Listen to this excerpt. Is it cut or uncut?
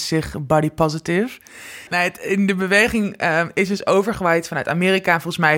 cut